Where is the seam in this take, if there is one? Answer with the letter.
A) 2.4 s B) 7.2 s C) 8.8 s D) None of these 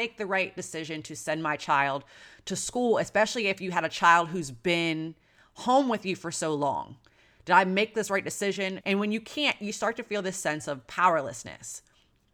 C